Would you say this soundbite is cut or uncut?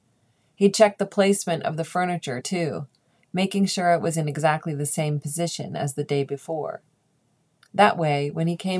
uncut